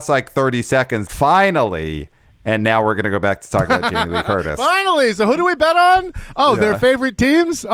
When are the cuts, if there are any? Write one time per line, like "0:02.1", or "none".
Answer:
0:01.1